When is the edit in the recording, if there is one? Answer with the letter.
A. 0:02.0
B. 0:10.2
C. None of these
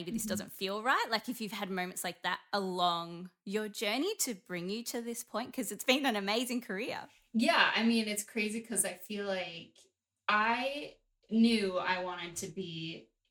C